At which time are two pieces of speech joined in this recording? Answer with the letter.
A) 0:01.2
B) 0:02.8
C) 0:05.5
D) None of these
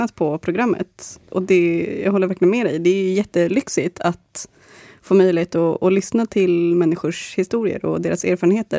D